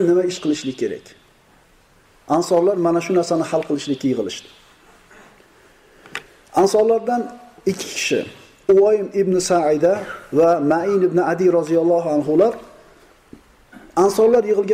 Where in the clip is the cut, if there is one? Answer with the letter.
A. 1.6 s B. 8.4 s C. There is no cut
C